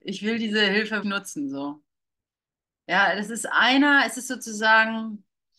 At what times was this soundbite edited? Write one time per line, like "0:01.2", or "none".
0:01.0

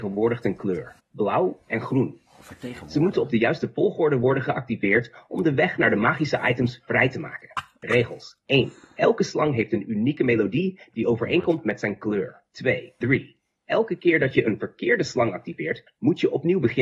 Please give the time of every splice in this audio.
0:01.0
0:13.0

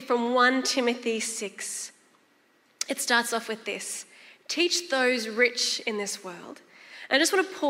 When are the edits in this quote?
none

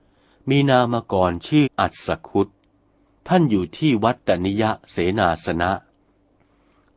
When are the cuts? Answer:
0:01.6

